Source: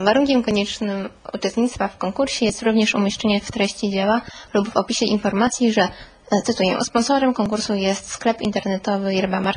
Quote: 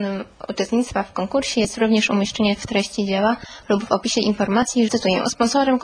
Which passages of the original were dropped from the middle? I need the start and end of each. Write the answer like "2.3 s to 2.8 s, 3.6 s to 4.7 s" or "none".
5.7 s to 6.4 s